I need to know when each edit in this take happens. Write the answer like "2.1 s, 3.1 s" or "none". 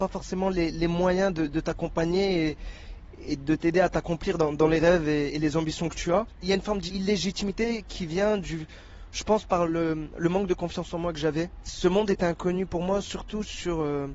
none